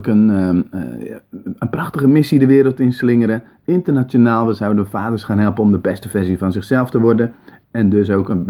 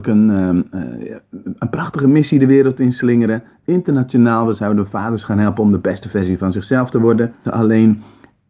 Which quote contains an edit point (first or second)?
second